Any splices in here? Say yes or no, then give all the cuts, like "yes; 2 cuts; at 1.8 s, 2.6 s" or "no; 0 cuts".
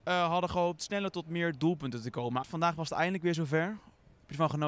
yes; 1 cut; at 2.4 s